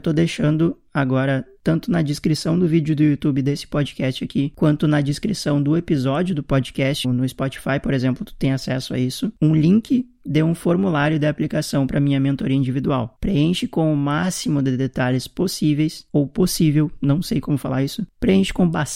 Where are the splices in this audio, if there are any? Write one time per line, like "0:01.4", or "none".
0:07.0